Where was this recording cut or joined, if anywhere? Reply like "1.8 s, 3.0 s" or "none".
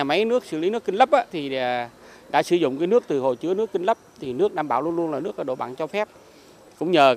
1.3 s